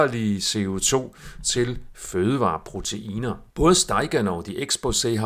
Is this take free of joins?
no; 1 cut; at 3.5 s

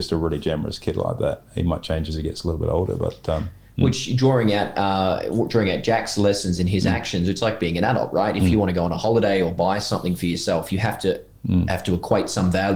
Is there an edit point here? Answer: no; 0 cuts

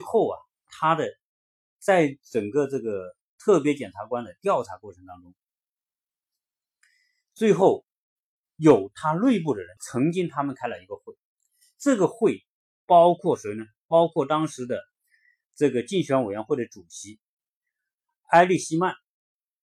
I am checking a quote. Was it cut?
yes; 1 cut; at 9.8 s

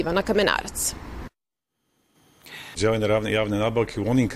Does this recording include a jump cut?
yes; 1 cut; at 2.7 s

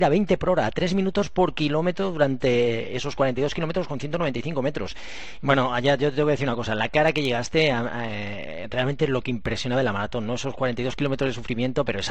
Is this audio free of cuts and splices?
no; 1 cut; at 5.4 s

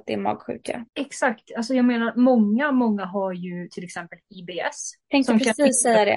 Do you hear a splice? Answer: no; 0 cuts

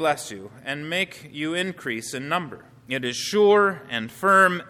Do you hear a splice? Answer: yes; 1 cut; at 2.8 s

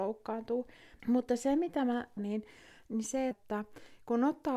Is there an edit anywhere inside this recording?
yes; 3 cuts; at 1.0 s, 2.2 s, 3.3 s

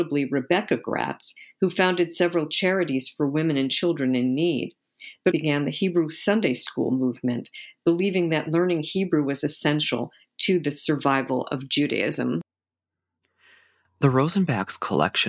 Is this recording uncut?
no; 1 cut; at 5.3 s

